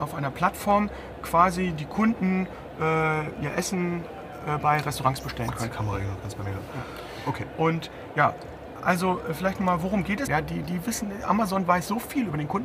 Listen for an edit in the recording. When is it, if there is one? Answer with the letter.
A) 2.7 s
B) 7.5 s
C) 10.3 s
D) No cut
C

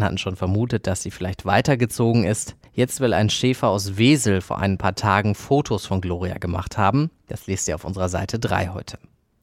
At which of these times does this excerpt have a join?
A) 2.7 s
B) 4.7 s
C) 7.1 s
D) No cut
A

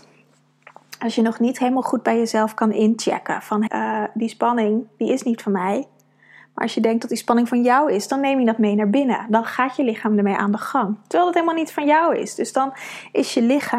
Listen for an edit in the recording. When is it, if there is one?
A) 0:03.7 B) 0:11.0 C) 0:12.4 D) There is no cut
A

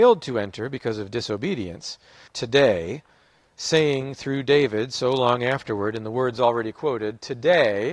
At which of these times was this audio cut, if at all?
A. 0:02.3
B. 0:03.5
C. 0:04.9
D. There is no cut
A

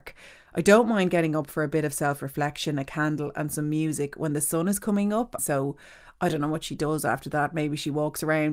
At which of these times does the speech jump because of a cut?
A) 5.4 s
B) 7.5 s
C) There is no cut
A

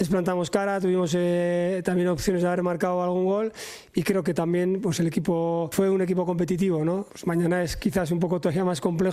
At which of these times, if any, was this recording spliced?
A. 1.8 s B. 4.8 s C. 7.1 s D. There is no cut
D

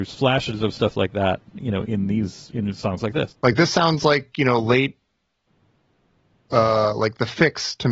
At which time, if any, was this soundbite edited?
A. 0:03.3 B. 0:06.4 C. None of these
A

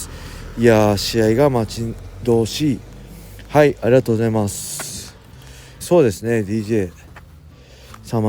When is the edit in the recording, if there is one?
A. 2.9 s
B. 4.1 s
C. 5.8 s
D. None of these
C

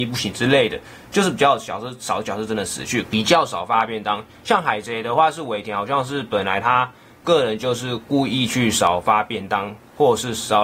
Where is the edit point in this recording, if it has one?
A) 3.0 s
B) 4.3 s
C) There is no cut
A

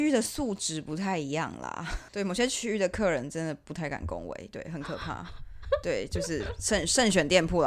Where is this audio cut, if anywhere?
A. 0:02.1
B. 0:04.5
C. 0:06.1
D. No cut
A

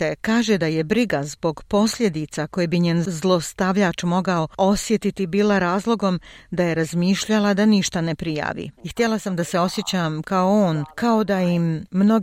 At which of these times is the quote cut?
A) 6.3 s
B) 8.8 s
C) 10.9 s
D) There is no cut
B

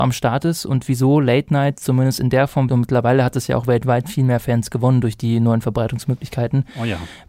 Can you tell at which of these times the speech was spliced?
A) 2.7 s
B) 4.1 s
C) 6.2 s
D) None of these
A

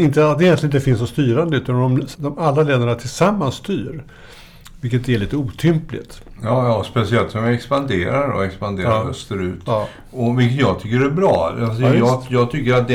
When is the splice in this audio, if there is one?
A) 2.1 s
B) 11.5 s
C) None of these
A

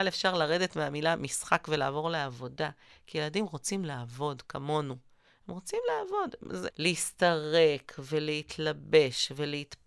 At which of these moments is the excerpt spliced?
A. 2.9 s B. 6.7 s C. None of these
B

